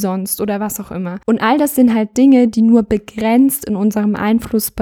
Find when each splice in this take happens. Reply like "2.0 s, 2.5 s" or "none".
1.2 s